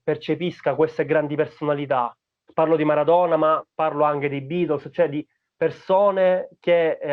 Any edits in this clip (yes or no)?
yes